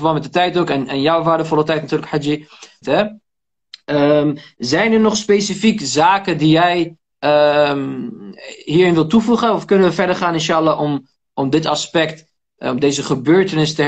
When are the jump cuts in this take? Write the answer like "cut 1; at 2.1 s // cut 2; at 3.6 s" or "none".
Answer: cut 1; at 2.8 s